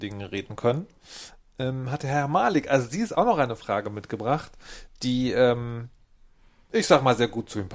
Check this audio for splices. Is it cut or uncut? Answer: uncut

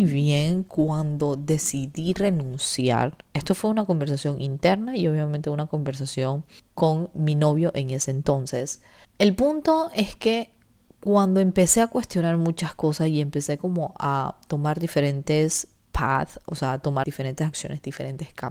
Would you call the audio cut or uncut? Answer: cut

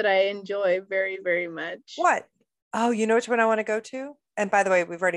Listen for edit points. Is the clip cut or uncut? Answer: cut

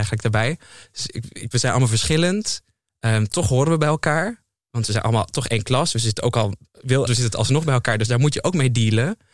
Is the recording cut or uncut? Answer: cut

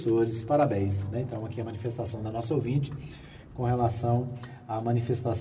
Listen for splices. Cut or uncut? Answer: uncut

